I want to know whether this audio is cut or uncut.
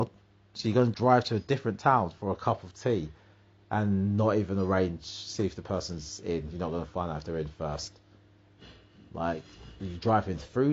cut